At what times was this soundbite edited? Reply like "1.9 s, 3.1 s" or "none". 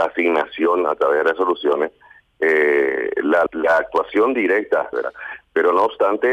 3.5 s, 4.9 s